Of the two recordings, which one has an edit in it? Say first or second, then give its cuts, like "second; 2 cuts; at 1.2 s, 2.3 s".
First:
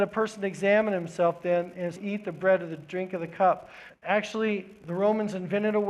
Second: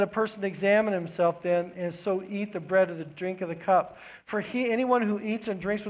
first; 2 cuts; at 2.0 s, 3.9 s